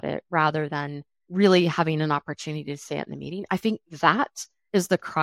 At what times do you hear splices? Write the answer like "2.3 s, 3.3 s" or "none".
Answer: none

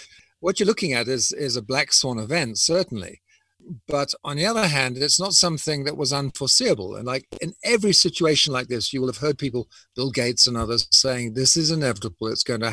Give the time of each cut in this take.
none

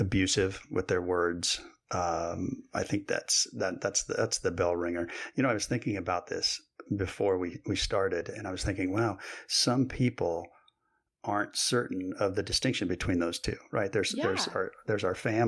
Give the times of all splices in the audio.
none

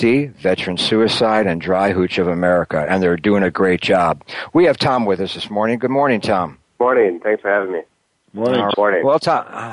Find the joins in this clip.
6.7 s, 8.7 s

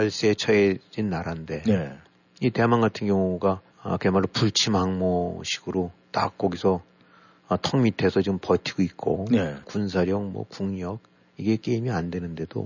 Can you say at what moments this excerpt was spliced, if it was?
3.7 s, 9.6 s

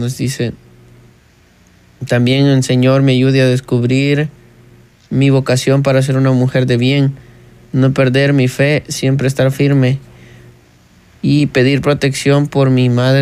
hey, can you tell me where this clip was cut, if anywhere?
none

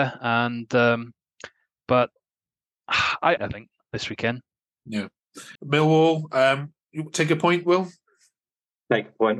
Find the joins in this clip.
3.4 s, 5.6 s

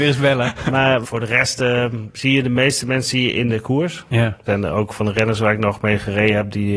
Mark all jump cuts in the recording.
1.0 s, 4.5 s

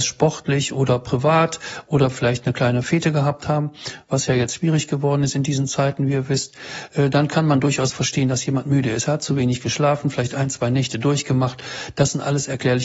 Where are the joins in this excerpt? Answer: none

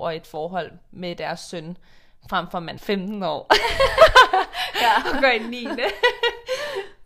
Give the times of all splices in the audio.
2.8 s

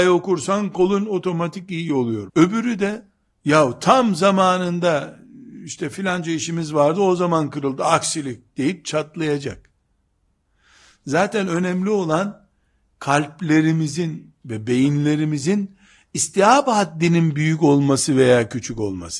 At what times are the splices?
2.3 s

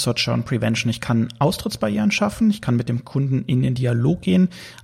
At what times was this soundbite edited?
none

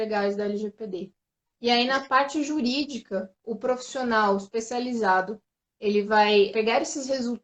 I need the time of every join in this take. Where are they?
1.4 s, 6.5 s

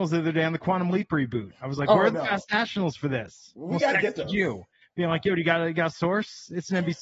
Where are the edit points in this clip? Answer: none

